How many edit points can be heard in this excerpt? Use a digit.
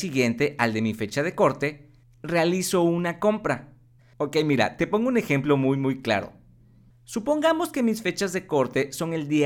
1